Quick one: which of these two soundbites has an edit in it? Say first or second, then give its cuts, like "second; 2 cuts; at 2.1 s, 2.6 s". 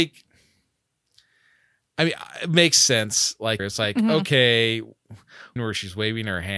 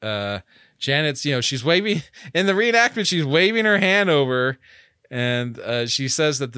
first; 2 cuts; at 3.6 s, 5.6 s